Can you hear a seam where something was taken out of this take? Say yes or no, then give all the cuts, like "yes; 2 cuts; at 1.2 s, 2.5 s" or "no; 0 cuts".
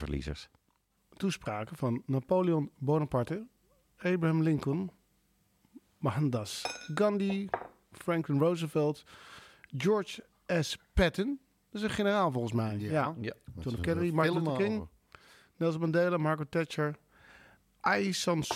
no; 0 cuts